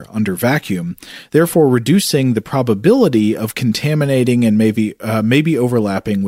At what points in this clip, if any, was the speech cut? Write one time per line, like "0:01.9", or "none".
none